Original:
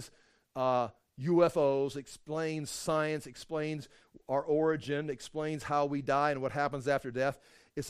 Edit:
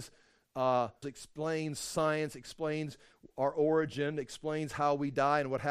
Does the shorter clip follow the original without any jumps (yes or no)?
no